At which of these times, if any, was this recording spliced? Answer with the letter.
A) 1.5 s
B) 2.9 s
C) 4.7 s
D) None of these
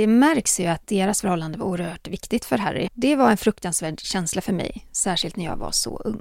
B